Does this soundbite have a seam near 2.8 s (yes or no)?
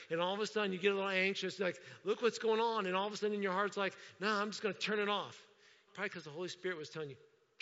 no